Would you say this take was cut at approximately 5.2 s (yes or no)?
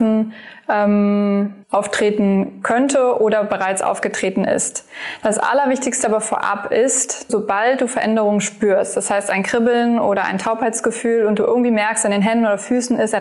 no